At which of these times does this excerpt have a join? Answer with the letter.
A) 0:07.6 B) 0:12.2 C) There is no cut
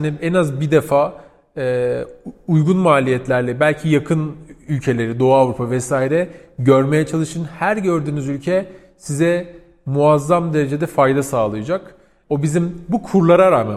B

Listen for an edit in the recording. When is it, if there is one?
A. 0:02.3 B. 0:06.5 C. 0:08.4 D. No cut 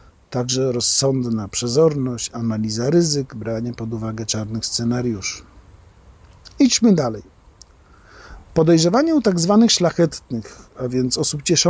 D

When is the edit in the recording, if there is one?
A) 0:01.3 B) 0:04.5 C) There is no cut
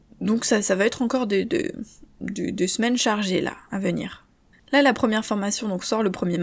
B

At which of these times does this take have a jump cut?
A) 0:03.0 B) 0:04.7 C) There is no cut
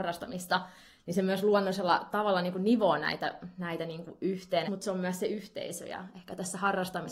B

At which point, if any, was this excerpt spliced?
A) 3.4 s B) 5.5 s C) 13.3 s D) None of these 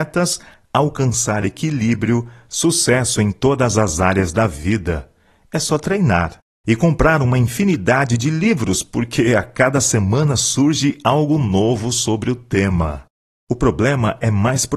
C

